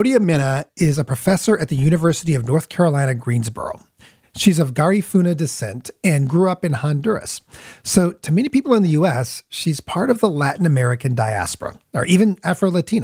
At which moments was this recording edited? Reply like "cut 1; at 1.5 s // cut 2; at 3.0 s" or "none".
none